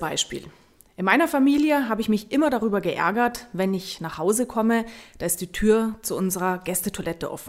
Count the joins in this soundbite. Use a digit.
0